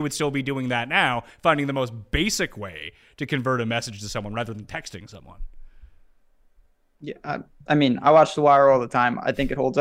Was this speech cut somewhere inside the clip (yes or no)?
no